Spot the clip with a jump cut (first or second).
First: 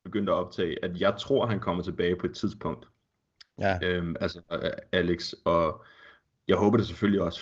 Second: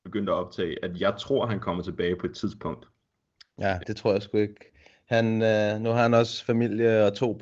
second